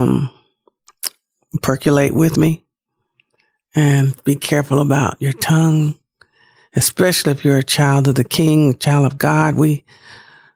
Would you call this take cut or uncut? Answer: uncut